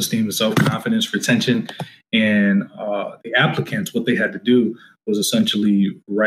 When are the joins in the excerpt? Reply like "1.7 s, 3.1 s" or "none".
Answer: none